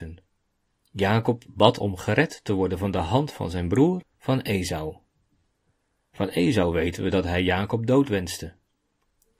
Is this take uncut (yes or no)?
yes